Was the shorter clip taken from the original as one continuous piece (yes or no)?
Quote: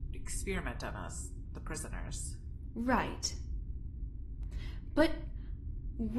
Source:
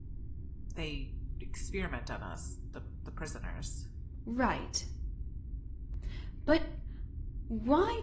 no